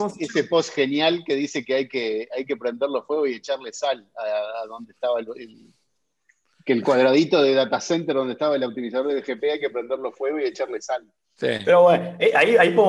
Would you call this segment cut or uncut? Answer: uncut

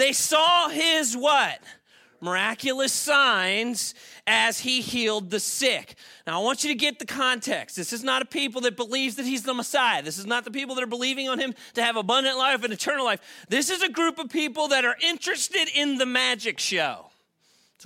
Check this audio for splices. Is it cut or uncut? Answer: uncut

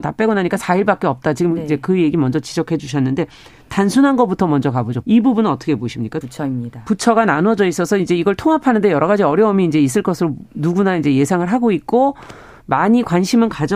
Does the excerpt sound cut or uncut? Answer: cut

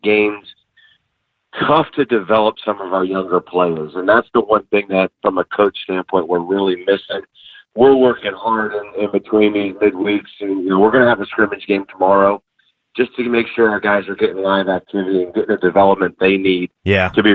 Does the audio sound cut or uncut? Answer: uncut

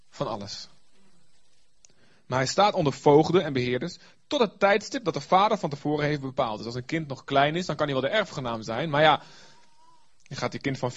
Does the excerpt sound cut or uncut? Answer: uncut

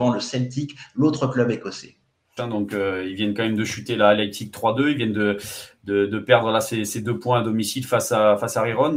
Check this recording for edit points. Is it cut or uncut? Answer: cut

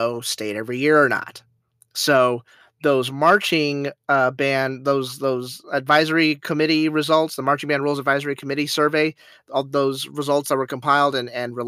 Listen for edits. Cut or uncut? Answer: uncut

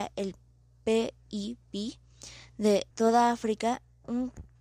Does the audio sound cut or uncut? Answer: cut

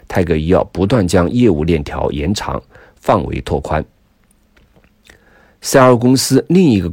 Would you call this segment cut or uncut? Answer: uncut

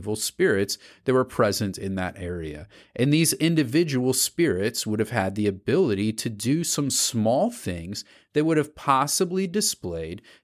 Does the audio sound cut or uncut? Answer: uncut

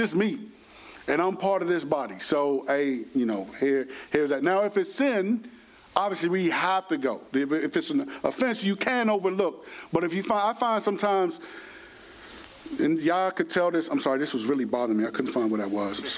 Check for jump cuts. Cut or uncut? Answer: uncut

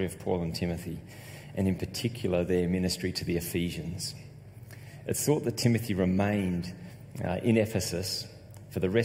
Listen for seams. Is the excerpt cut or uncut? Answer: uncut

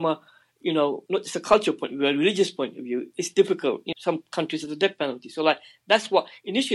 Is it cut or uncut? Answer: cut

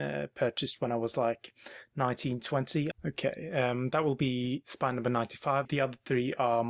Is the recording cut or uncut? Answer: cut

